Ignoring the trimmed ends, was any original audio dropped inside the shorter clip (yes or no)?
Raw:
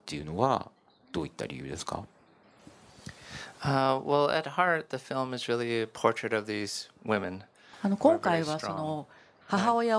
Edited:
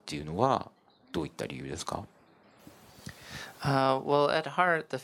no